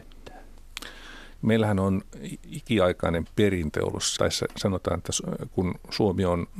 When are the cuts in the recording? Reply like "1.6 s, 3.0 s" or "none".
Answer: 1.4 s, 4.2 s